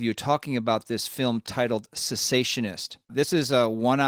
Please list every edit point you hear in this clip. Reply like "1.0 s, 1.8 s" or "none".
3.0 s